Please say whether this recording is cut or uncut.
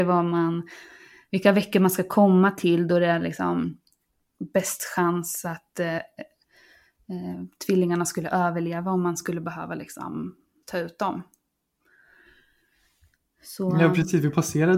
uncut